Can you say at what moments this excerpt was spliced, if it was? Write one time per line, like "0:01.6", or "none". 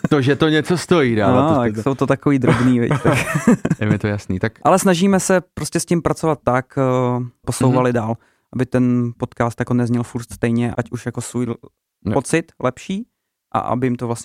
0:07.4
0:10.7